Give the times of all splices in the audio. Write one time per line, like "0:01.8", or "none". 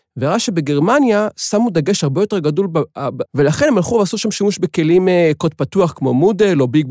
0:03.3

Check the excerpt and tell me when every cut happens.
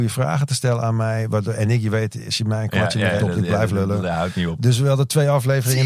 0:03.2

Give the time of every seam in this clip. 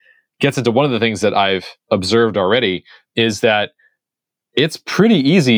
0:01.8

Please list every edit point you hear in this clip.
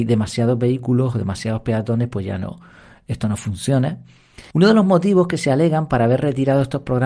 0:04.5

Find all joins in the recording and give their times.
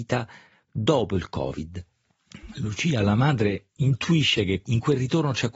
none

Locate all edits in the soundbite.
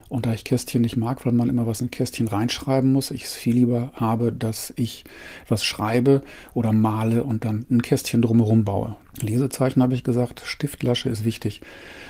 0:09.0

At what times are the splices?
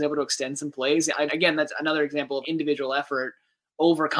0:01.3
0:02.4

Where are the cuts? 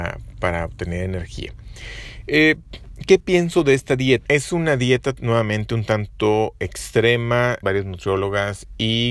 0:04.3
0:07.6

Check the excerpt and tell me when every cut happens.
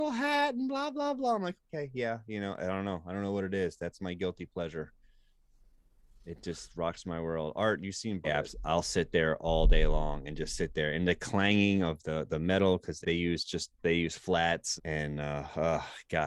0:08.2
0:13.0
0:14.8

